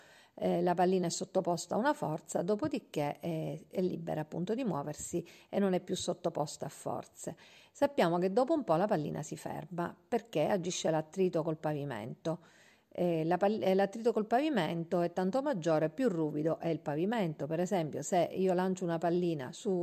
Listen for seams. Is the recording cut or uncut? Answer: uncut